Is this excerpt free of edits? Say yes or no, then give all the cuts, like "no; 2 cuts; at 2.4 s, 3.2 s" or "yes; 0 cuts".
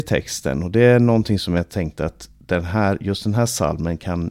yes; 0 cuts